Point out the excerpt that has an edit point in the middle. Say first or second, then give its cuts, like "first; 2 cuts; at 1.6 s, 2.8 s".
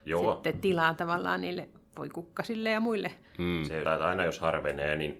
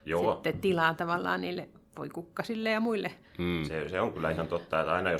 first; 1 cut; at 3.9 s